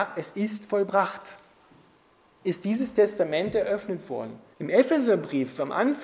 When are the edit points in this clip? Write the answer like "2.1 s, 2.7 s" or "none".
4.5 s